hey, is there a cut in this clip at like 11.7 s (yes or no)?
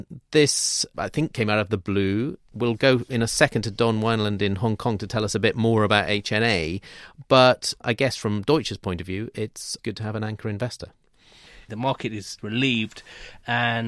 yes